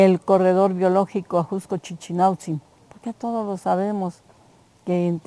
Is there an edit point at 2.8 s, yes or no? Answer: yes